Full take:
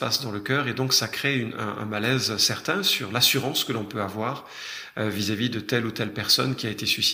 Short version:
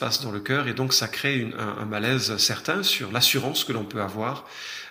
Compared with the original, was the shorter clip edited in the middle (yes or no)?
no